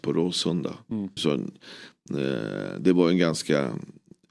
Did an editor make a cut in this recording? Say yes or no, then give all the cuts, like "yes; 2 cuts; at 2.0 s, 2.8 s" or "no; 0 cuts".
yes; 1 cut; at 1.2 s